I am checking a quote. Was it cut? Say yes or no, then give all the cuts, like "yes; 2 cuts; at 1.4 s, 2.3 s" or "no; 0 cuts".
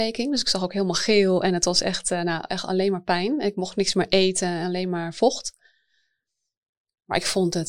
no; 0 cuts